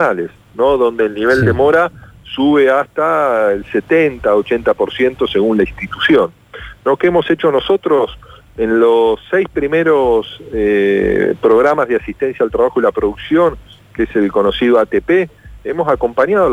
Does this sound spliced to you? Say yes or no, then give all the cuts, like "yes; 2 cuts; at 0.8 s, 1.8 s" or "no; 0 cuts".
no; 0 cuts